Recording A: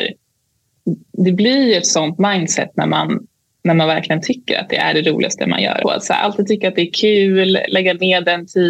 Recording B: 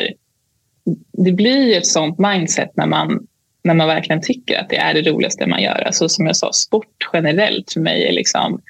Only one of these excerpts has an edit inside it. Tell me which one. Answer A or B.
A